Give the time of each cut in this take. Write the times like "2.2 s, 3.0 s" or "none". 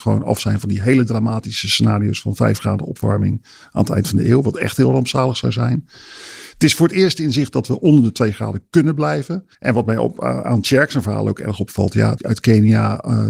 9.5 s, 12.2 s

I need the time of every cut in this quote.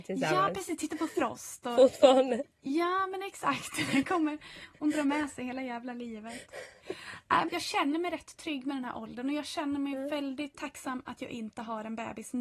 7.5 s

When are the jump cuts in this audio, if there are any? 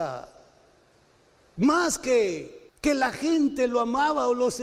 2.7 s

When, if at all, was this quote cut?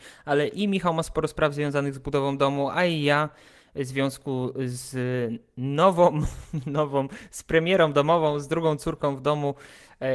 none

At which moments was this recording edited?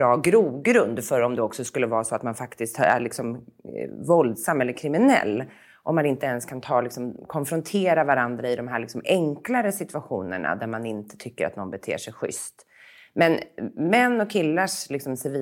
none

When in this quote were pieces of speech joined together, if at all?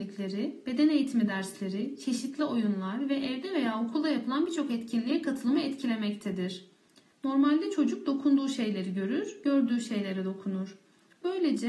7.1 s

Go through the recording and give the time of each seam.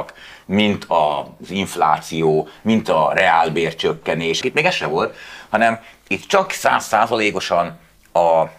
4.4 s

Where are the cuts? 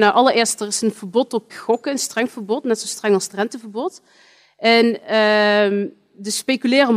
1.5 s

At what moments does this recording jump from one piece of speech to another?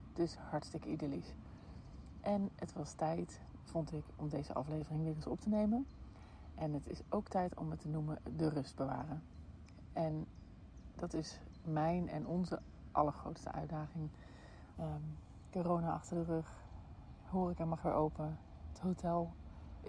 14.8 s

